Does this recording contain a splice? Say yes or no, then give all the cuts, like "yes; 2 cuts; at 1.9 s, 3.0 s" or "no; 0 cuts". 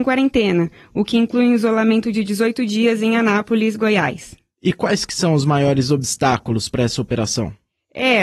no; 0 cuts